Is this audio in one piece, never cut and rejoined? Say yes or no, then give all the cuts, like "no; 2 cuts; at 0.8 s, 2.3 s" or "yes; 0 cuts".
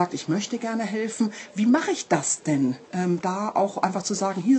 no; 1 cut; at 2.8 s